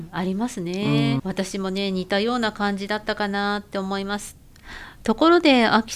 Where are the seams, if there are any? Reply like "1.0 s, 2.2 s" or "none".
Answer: 1.2 s